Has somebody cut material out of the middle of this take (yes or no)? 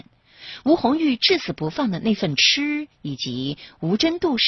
no